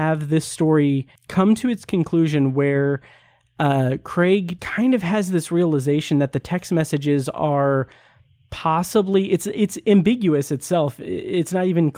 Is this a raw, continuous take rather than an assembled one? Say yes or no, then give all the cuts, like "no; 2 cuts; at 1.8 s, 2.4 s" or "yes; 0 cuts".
no; 2 cuts; at 1.2 s, 4.6 s